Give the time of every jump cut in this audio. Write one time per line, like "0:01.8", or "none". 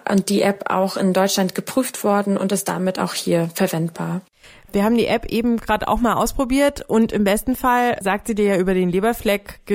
none